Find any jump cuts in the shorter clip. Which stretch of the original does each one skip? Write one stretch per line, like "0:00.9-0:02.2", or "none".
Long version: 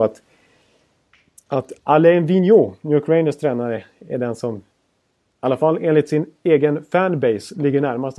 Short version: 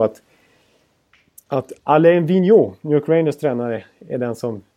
none